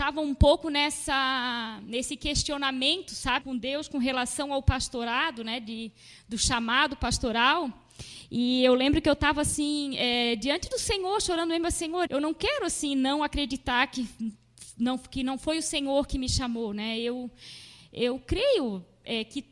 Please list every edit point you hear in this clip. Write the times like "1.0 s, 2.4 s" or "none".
3.4 s, 12.1 s